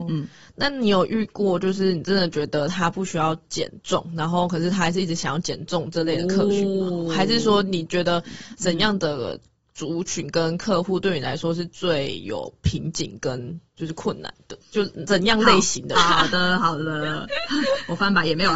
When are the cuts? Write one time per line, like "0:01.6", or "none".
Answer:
0:14.6
0:16.0